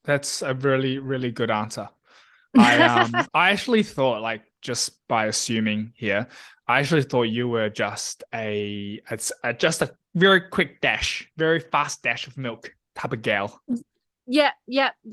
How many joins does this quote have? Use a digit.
0